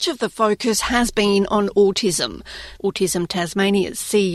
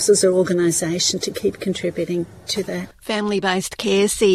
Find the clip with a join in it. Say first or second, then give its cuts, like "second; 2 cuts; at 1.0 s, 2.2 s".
first; 1 cut; at 2.7 s